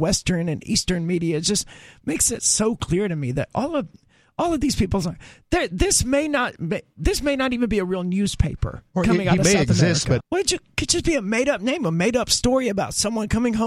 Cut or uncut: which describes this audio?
cut